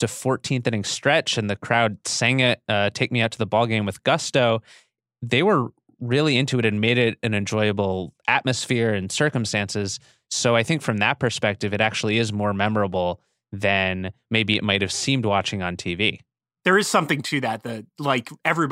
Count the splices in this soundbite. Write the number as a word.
zero